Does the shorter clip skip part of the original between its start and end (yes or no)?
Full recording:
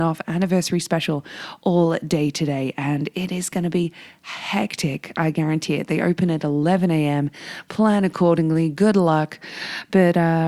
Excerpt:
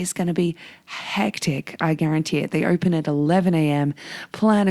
no